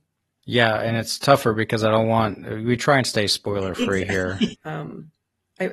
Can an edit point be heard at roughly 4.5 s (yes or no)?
yes